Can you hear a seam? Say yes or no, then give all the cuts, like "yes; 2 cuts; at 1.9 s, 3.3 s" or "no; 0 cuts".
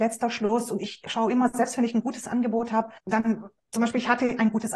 yes; 1 cut; at 3.0 s